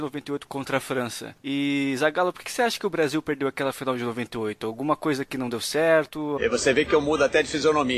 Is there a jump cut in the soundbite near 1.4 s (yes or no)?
no